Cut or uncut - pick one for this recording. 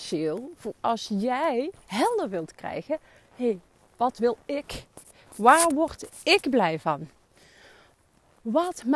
uncut